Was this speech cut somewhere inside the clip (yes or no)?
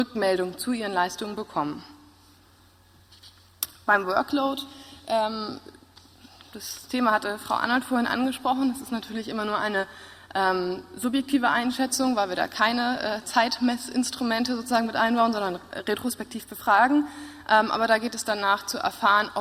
no